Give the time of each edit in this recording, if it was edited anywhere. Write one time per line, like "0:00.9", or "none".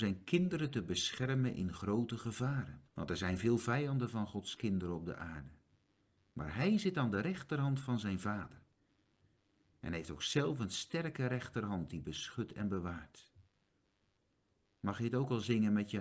0:02.9